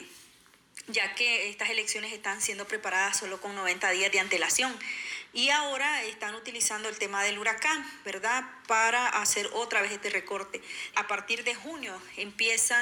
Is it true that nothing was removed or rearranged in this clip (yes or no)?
no